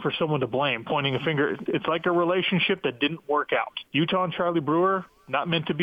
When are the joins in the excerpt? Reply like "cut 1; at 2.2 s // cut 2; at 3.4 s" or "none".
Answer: cut 1; at 1.7 s // cut 2; at 3.9 s